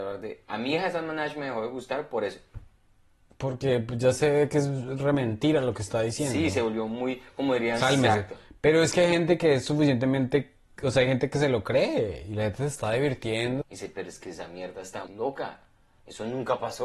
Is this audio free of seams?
no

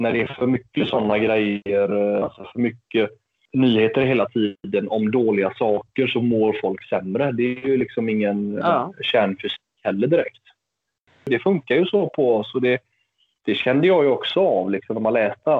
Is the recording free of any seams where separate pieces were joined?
yes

